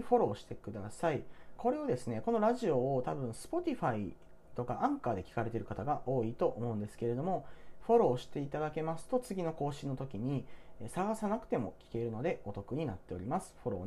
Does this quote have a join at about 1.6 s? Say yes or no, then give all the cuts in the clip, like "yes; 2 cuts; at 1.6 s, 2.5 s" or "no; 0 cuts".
yes; 1 cut; at 1.6 s